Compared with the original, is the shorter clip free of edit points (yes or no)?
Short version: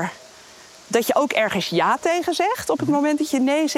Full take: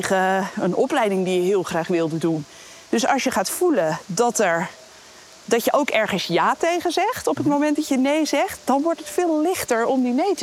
yes